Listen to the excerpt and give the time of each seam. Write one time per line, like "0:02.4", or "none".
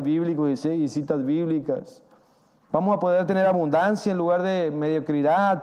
0:02.7